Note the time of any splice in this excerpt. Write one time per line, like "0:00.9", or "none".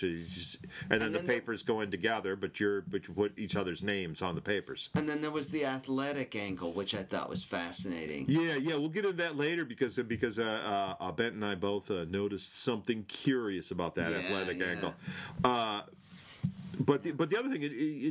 none